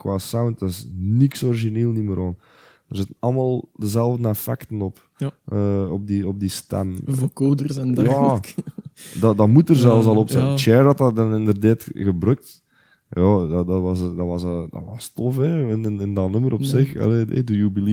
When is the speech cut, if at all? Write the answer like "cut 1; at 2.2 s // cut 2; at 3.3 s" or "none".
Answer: none